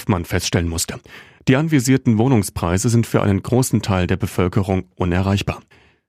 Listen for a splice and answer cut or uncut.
cut